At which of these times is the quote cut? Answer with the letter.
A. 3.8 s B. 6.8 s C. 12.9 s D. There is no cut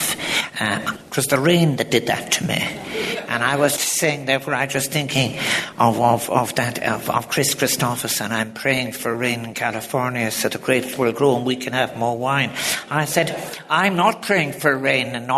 A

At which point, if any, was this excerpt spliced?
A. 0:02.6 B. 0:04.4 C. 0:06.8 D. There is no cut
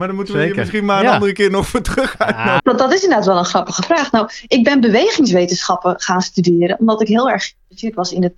A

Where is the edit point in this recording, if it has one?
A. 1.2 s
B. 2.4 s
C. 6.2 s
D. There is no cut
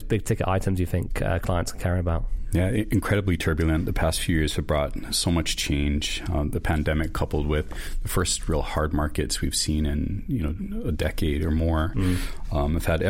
D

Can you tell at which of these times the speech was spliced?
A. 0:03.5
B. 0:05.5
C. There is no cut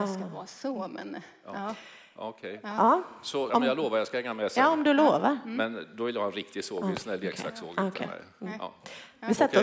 A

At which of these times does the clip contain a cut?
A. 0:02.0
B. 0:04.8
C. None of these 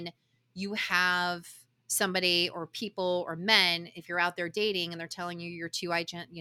C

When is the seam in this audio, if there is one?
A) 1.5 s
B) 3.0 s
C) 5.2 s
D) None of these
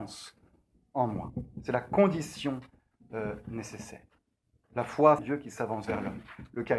C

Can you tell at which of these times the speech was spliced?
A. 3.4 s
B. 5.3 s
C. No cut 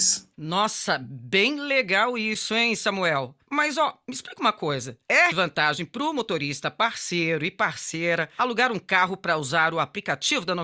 B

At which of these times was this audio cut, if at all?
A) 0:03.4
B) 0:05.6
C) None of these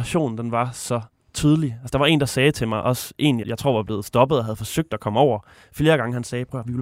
A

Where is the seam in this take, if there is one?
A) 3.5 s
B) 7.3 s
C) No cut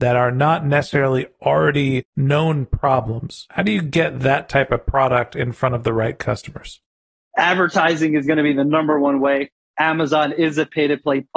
C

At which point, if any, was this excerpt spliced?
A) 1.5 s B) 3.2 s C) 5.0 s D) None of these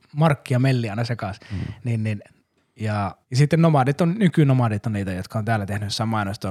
B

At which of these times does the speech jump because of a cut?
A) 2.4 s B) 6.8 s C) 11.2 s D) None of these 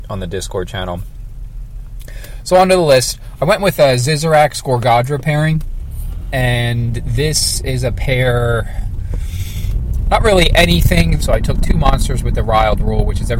C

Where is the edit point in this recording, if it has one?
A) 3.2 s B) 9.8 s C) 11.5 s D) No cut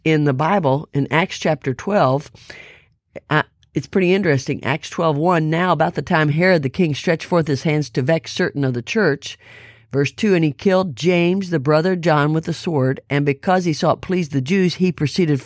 D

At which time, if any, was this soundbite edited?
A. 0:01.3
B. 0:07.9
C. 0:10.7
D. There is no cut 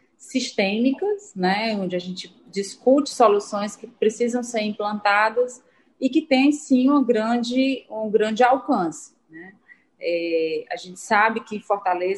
D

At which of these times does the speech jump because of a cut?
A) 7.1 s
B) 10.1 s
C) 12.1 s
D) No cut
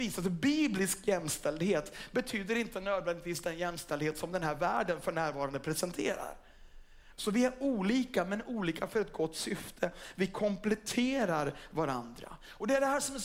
A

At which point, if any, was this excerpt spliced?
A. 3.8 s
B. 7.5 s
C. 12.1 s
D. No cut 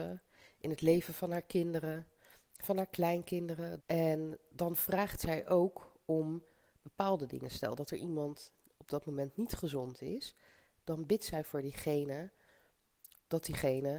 A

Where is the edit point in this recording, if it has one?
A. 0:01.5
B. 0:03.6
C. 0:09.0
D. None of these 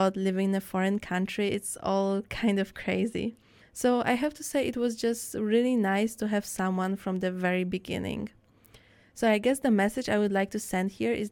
B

